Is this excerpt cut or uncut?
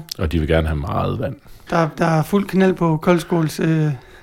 cut